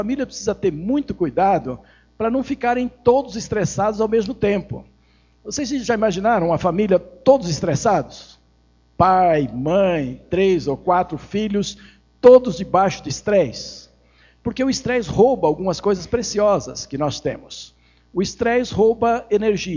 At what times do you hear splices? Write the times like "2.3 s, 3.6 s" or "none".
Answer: none

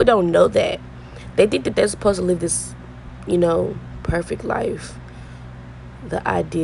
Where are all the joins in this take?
none

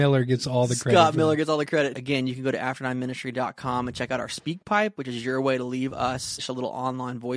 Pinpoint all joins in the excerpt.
1.9 s, 6.4 s

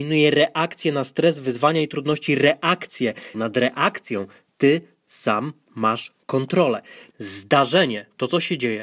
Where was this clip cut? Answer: 3.3 s, 7.1 s

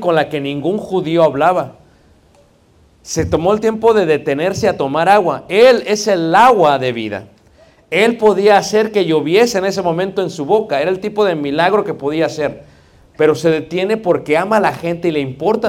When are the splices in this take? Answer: none

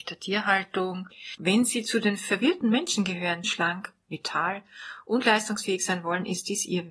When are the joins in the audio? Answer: 1.4 s, 3.4 s

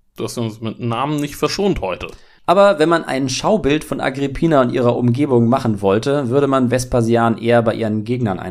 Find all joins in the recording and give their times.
2.4 s

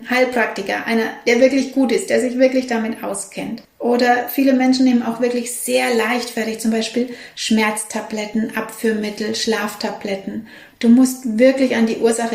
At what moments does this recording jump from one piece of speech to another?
10.7 s

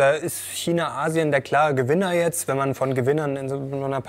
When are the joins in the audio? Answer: none

